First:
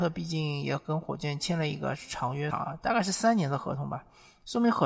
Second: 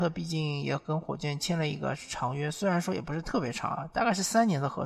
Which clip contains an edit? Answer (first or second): first